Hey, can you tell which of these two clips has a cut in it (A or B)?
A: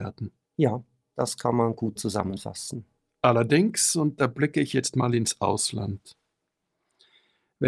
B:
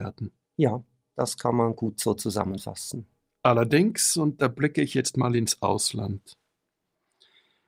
A